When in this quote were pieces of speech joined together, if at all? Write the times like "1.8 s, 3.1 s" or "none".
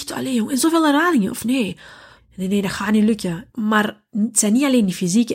2.2 s, 3.5 s